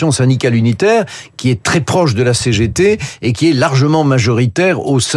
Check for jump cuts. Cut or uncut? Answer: uncut